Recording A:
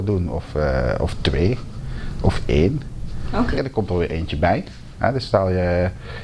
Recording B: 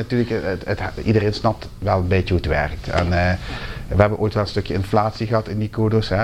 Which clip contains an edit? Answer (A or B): A